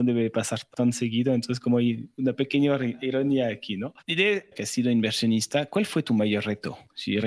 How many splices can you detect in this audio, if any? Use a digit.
1